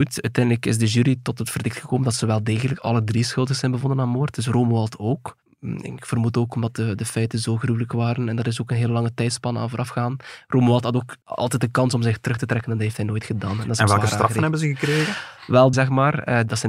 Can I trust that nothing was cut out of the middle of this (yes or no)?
no